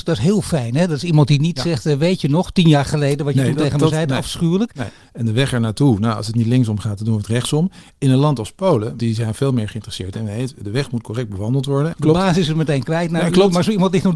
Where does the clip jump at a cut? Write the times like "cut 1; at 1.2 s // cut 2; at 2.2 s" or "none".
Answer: cut 1; at 5.0 s // cut 2; at 9.0 s // cut 3; at 11.9 s